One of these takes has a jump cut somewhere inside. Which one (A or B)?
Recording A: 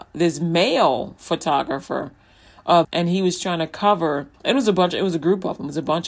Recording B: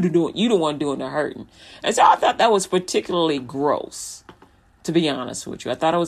A